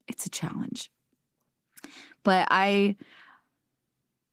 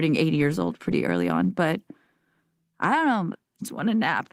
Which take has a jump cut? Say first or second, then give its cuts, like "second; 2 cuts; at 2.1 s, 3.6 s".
second; 1 cut; at 3.3 s